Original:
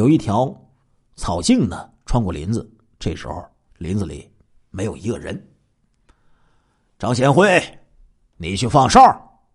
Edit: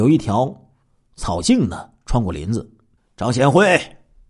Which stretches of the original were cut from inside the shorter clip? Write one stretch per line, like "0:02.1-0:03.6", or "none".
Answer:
0:03.0-0:06.8